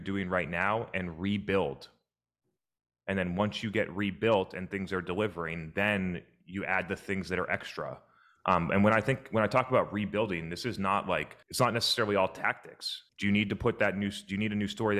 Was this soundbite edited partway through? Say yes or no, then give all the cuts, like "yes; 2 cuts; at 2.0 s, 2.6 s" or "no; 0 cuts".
yes; 2 cuts; at 11.4 s, 13.1 s